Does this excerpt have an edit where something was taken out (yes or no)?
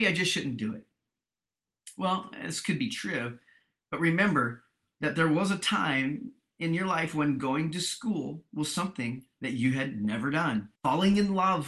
yes